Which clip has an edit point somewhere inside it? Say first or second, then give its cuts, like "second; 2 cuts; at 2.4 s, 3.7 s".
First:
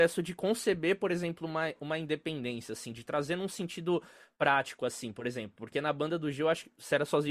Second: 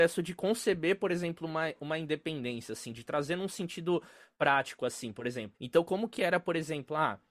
second; 1 cut; at 5.5 s